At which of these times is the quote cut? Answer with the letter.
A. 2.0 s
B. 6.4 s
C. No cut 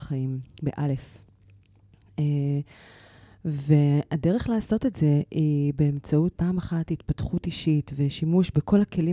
B